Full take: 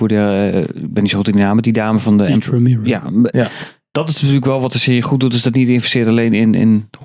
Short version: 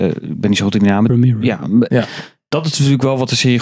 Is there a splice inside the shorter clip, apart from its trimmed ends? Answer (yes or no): yes